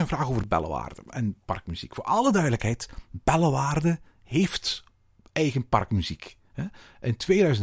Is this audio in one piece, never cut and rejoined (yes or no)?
yes